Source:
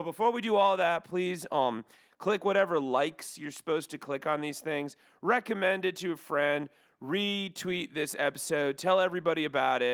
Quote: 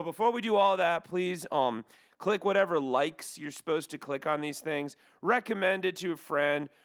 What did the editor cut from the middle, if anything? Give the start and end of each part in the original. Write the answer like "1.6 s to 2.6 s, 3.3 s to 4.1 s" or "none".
none

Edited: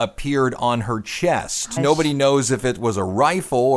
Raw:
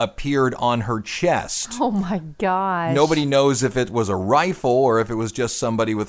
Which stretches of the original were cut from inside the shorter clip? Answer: 1.8 s to 2.9 s

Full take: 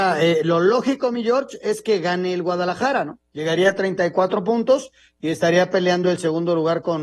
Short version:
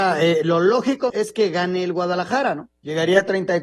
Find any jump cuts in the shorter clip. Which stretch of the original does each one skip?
1.1 s to 1.6 s

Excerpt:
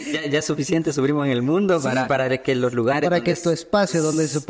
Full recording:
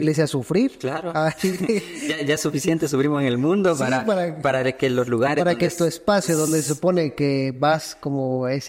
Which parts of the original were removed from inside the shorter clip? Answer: 4.0 s to 4.4 s

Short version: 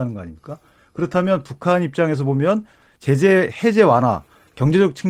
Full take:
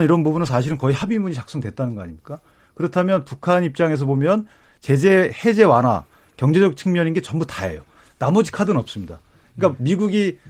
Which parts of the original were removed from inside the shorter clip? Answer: none

